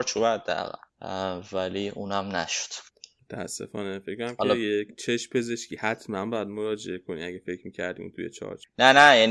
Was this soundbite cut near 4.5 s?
no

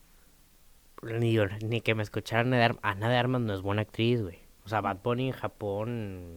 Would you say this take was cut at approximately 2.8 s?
no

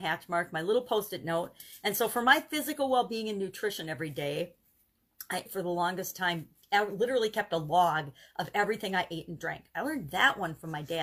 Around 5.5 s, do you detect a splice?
yes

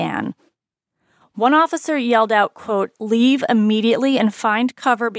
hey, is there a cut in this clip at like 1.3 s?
no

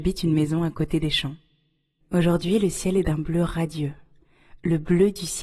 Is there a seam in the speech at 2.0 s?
yes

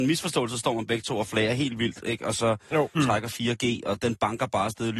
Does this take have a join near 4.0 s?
yes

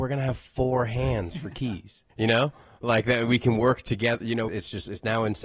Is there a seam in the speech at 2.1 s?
yes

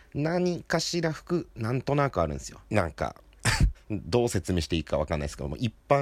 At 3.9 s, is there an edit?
no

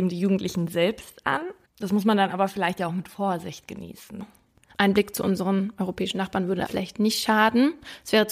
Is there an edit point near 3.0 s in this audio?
no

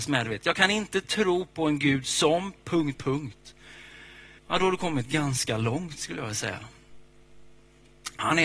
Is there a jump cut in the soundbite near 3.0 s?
yes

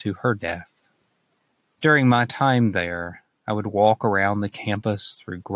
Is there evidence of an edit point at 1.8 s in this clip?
yes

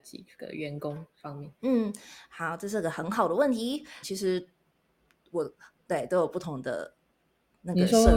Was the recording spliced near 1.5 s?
no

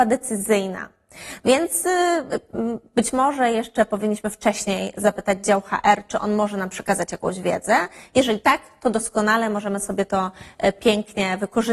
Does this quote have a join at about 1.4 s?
yes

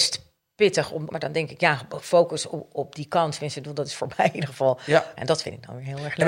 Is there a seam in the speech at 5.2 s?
yes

